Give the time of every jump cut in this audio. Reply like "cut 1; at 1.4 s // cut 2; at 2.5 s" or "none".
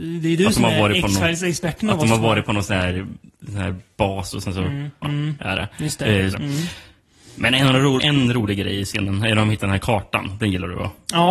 cut 1; at 5.0 s // cut 2; at 6.3 s // cut 3; at 8.0 s